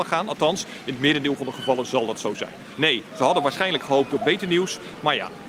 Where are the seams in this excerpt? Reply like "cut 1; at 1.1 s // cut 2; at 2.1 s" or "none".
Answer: none